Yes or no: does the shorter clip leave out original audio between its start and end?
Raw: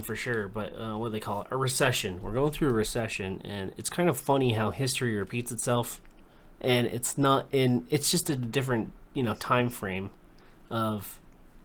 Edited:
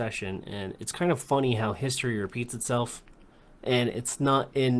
no